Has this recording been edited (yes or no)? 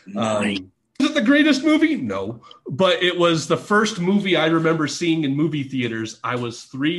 yes